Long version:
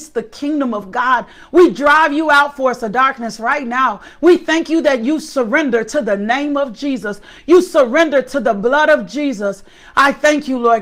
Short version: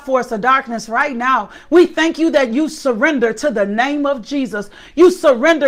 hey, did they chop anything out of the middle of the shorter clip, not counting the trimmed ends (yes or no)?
no